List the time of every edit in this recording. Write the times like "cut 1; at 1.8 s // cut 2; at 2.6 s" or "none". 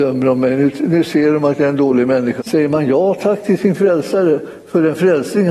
cut 1; at 2.4 s